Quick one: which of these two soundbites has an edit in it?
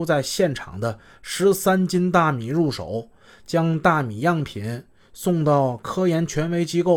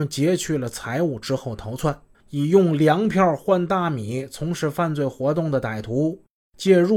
second; 1 cut; at 2.1 s

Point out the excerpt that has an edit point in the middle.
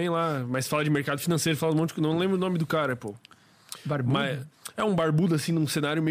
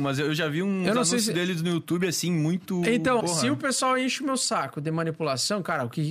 second; 1 cut; at 3.2 s

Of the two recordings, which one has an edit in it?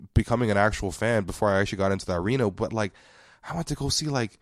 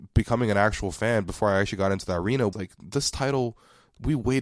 second; 1 cut; at 2.5 s

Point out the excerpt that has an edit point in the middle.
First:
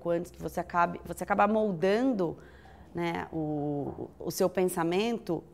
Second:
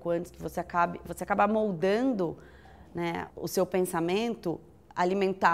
second; 1 cut; at 3.3 s

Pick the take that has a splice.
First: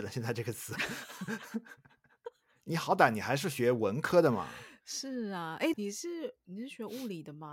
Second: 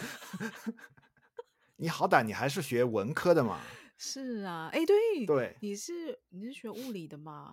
first; 1 cut; at 5.7 s

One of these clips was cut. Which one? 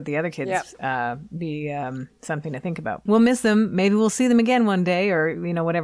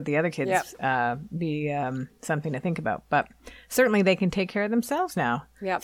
first; 1 cut; at 3.1 s

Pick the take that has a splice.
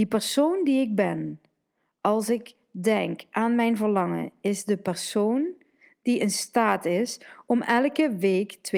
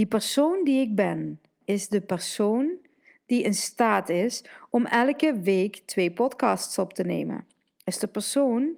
second; 1 cut; at 1.6 s

